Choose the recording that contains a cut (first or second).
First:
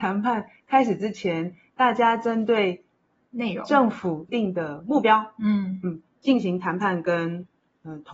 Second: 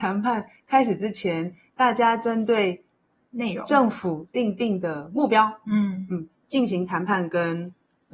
first